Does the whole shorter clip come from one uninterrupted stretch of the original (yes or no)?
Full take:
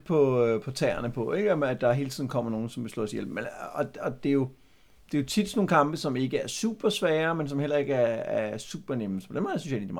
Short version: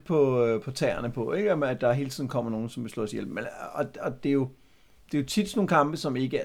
yes